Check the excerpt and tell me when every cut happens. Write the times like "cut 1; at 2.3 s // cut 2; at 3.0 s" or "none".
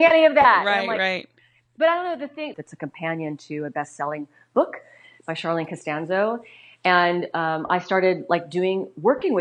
cut 1; at 2.5 s